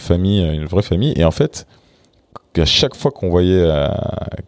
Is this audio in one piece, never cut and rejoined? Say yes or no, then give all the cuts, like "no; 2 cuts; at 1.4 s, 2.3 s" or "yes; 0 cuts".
yes; 0 cuts